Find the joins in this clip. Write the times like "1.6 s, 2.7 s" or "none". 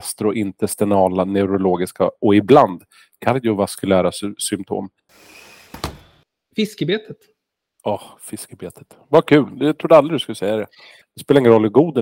11.0 s